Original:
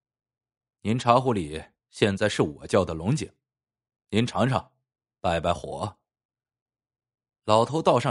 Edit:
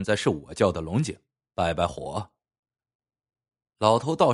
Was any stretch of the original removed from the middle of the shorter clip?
yes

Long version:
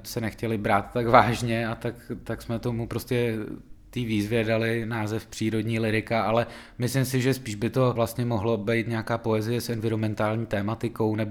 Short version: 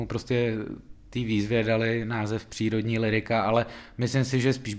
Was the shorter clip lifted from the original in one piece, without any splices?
yes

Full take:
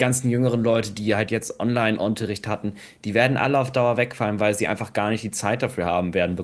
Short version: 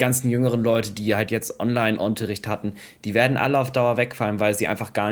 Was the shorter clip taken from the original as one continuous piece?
yes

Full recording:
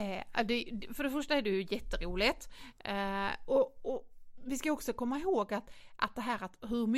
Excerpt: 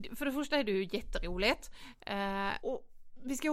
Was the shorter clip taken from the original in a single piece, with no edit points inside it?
no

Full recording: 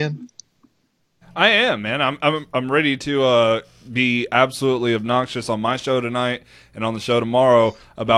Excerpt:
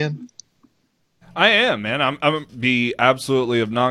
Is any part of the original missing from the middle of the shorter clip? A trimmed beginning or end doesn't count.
yes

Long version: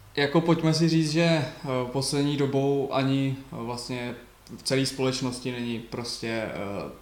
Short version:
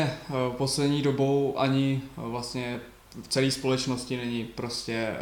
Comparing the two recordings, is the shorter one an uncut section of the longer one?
yes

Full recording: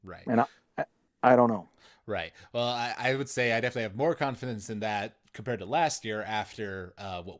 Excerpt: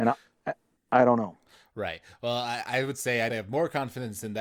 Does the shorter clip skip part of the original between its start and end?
yes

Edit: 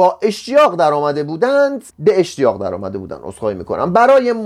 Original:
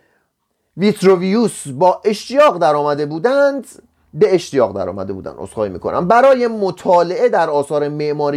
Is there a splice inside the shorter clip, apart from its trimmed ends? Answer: yes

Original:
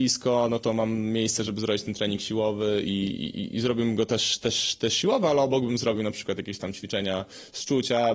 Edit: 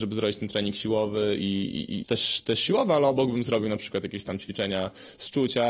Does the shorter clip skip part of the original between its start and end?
yes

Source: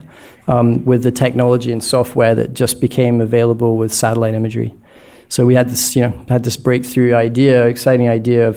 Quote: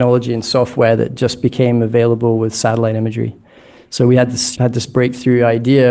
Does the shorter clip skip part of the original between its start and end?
yes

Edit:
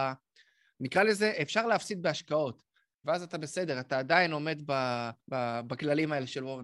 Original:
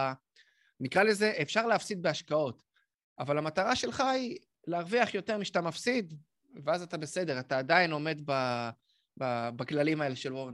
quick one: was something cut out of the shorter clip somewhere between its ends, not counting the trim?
yes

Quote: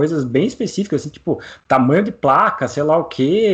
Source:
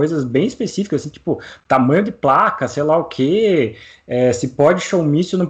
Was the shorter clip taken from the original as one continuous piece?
yes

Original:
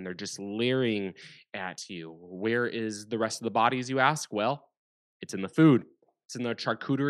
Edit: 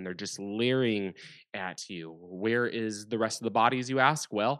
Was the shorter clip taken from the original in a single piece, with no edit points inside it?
yes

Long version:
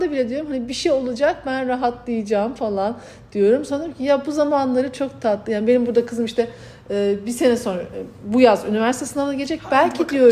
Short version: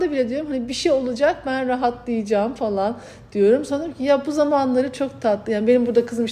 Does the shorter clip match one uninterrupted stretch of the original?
yes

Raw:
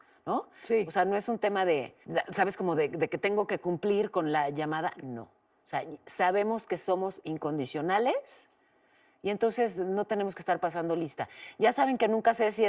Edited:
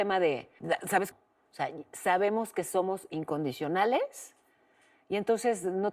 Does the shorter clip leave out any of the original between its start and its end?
yes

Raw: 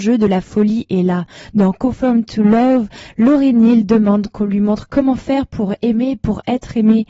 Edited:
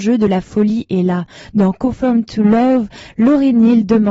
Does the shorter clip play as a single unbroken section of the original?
yes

